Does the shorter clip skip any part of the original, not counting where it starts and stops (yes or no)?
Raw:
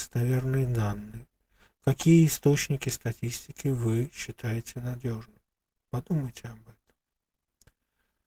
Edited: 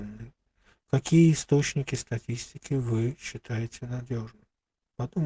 no